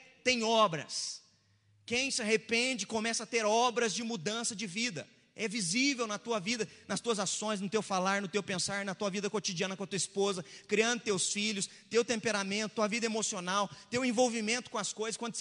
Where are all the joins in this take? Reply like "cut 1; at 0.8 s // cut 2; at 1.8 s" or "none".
none